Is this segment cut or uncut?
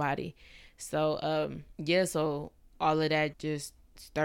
cut